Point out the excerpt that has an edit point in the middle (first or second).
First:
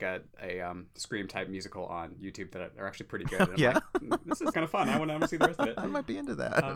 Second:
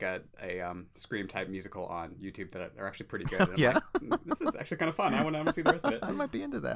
first